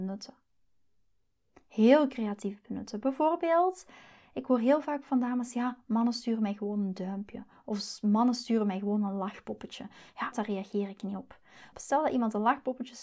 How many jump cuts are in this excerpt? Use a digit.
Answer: 2